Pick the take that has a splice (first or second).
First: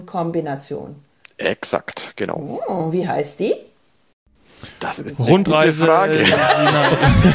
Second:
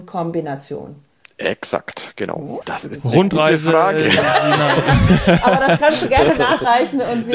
second